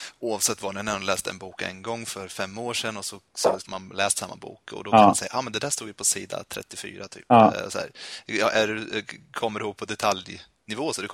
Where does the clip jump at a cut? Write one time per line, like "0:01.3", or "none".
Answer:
0:03.7